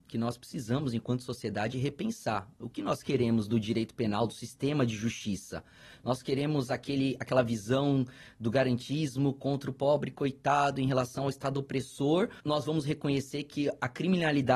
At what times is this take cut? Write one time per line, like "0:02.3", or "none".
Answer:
0:12.4